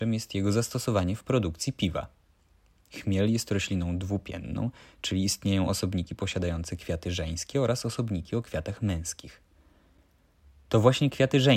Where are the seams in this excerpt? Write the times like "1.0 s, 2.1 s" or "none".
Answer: none